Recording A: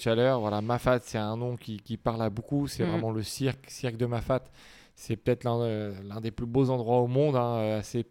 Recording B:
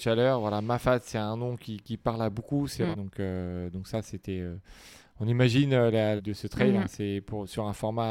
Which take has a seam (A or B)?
B